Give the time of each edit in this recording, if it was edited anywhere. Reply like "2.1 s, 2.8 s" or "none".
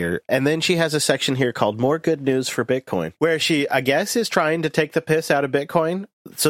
none